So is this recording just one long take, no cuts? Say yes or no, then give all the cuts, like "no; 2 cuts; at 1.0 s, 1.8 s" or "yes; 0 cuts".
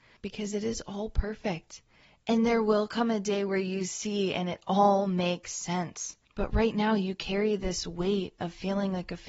no; 1 cut; at 6.2 s